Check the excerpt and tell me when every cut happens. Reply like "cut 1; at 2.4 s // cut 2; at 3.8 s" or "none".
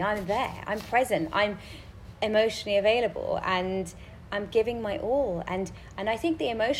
none